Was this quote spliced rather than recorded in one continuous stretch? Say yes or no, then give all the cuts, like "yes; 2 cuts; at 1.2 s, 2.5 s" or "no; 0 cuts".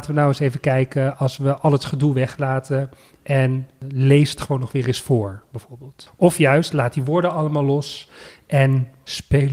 no; 0 cuts